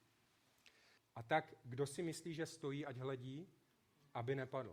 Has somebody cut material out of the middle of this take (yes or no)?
yes